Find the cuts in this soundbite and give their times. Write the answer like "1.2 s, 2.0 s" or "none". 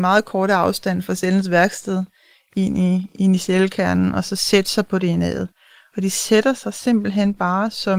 none